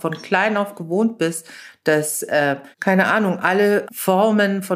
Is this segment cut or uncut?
cut